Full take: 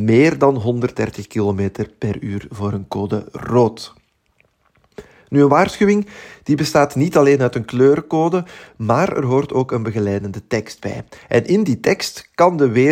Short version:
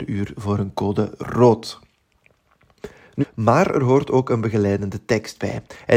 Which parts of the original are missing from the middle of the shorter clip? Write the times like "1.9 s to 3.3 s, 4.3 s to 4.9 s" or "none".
5.3 s to 8.6 s